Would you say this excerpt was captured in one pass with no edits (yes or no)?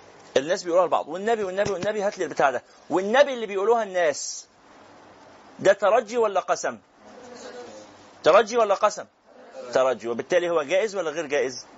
yes